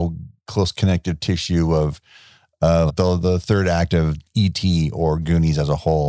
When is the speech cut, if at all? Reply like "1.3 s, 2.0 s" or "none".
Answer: 2.9 s